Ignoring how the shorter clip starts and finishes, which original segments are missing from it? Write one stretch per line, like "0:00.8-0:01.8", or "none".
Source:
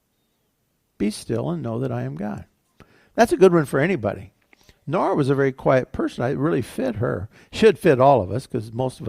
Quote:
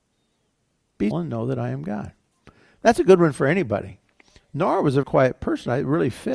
0:01.1-0:01.4
0:05.4-0:05.5